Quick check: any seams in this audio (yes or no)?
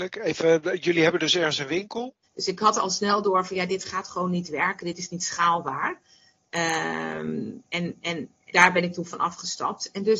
yes